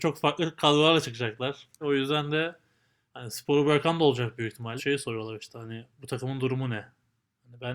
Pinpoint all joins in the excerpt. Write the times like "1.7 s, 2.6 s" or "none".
1.8 s, 4.8 s